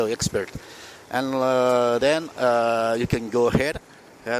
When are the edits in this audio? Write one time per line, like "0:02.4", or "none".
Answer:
none